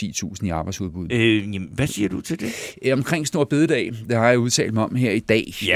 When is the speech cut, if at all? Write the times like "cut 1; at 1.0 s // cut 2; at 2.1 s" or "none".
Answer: cut 1; at 1.1 s

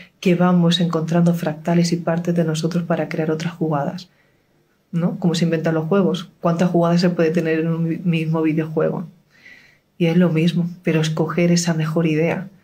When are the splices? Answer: none

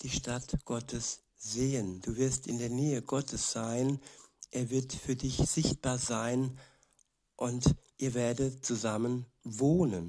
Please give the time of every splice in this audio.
none

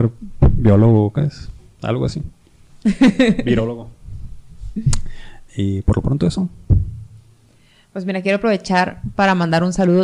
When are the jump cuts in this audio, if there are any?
none

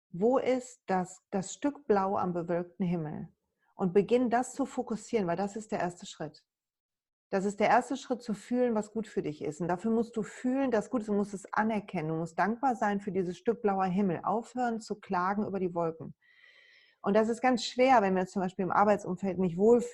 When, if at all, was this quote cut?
cut 1; at 1.3 s

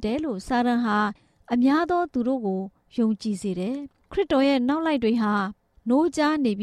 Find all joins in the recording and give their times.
none

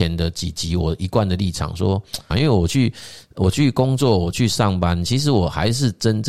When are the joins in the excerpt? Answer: cut 1; at 2.3 s

